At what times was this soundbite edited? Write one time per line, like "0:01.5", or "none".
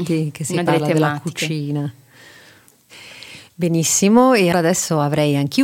0:04.5